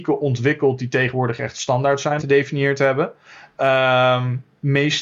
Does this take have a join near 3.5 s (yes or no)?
no